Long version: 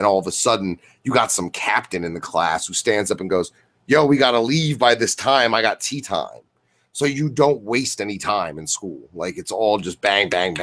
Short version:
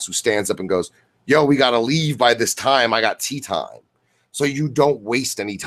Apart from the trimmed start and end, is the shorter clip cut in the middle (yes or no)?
no